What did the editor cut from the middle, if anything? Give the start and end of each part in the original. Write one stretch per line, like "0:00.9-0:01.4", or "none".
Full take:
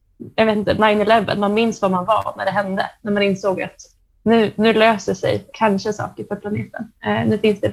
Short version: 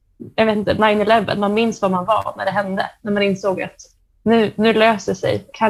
none